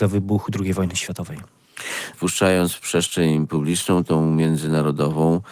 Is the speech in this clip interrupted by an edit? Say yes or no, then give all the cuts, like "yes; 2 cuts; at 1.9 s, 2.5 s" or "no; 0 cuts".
yes; 1 cut; at 2.1 s